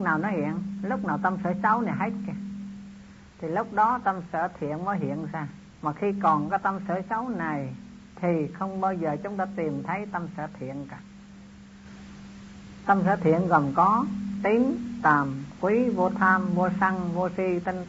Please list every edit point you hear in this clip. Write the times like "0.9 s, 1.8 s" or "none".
5.7 s